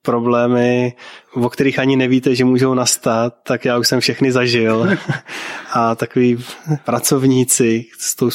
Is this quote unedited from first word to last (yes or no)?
yes